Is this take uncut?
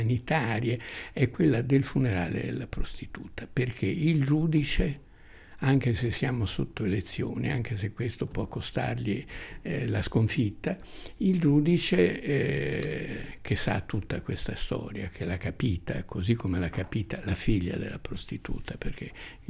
yes; 0 cuts

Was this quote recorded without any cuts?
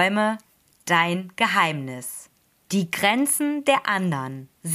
no; 1 cut; at 2.6 s

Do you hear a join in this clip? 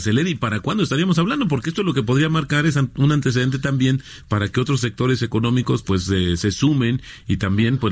no; 0 cuts

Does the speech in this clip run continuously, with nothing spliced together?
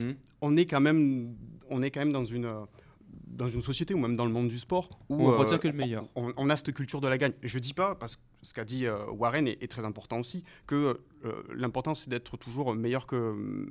yes; 0 cuts

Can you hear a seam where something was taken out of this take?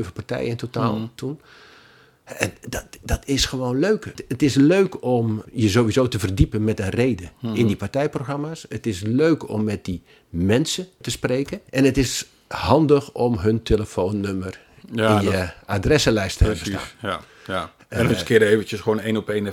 yes; 1 cut; at 11.7 s

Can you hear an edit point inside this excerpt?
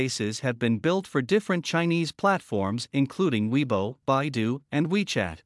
no; 0 cuts

